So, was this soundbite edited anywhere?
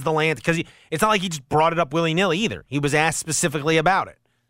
no; 0 cuts

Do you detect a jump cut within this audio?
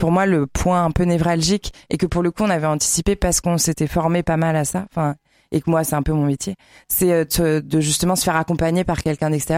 no; 0 cuts

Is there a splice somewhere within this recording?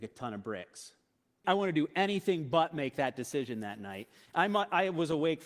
yes; 1 cut; at 1.4 s

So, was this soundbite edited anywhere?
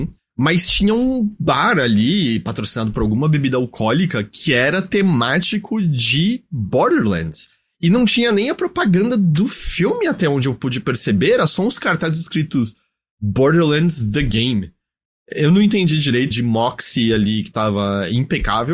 yes; 1 cut; at 16.3 s

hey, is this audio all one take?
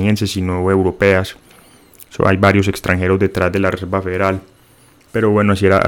yes; 0 cuts

